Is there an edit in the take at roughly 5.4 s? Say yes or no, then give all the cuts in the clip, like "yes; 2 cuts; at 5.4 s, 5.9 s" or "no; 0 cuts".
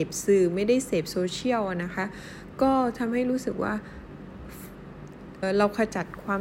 yes; 1 cut; at 5.4 s